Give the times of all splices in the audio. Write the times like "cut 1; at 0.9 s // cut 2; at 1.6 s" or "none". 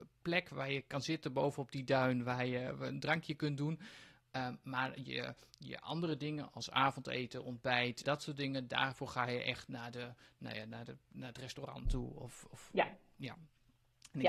cut 1; at 8.0 s